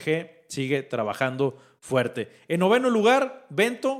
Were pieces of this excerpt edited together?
no; 0 cuts

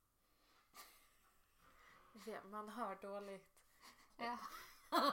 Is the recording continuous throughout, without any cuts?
no; 1 cut; at 4.1 s

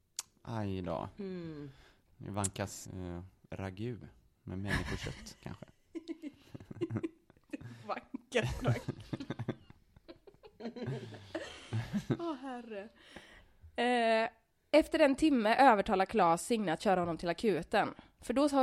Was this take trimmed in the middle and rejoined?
yes; 1 cut; at 2.9 s

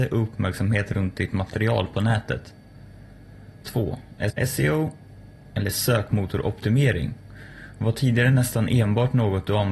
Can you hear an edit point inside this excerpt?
yes; 1 cut; at 4.3 s

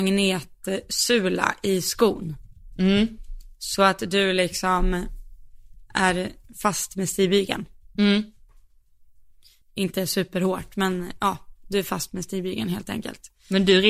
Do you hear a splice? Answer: no; 0 cuts

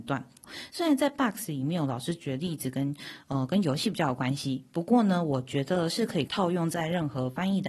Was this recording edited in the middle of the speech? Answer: yes; 1 cut; at 6.3 s

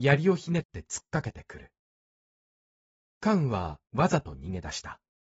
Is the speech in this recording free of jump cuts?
no; 1 cut; at 3.9 s

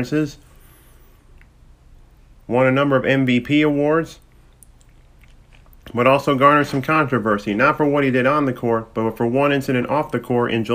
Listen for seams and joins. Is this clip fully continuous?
yes; 0 cuts

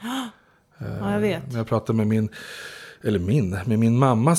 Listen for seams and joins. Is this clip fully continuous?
yes; 0 cuts

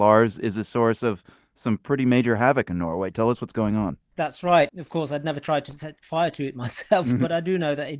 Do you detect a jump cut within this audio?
yes; 1 cut; at 4.7 s

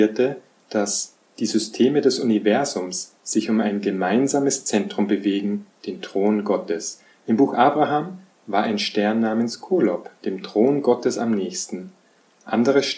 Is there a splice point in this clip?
no; 0 cuts

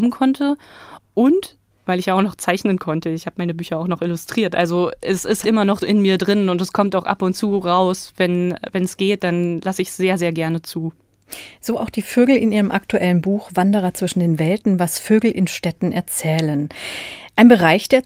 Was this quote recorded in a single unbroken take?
no; 1 cut; at 5.4 s

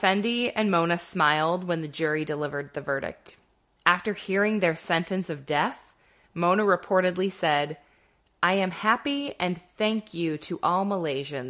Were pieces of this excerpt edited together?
no; 0 cuts

